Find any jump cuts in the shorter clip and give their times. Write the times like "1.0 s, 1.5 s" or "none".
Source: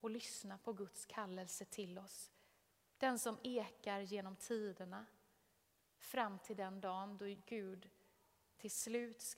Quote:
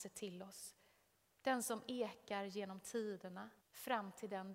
3.6 s